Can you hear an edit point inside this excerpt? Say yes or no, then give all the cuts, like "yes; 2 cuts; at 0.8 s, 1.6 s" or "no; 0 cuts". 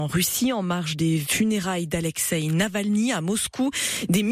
no; 0 cuts